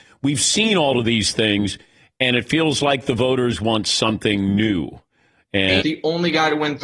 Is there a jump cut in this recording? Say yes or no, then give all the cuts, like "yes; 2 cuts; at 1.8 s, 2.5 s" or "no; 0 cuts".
yes; 1 cut; at 5.8 s